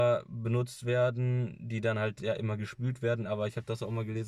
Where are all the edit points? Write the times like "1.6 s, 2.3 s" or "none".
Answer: none